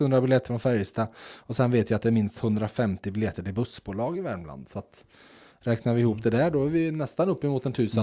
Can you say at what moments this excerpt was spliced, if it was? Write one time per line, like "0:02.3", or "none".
none